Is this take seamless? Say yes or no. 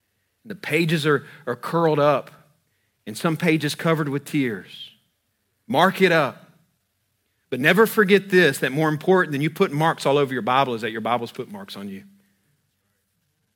yes